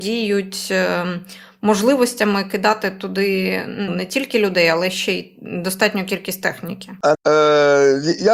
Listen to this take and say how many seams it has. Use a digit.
2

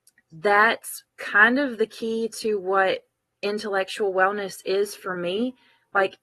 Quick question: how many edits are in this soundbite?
1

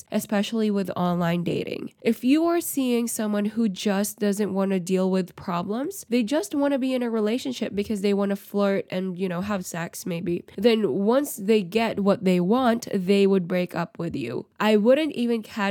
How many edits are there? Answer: 0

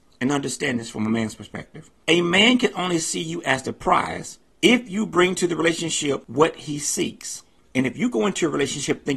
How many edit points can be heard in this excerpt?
1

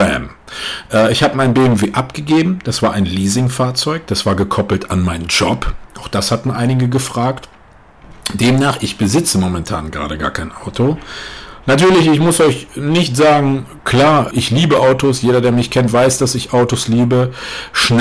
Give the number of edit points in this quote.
1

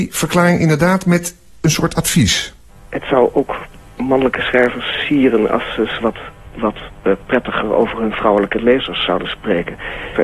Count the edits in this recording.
0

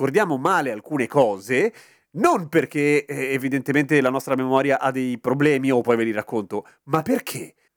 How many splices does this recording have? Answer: 1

